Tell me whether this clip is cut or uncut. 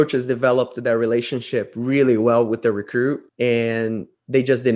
cut